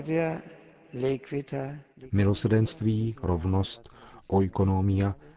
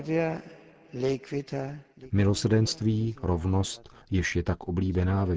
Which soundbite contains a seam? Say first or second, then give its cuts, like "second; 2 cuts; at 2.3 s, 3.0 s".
second; 1 cut; at 4.0 s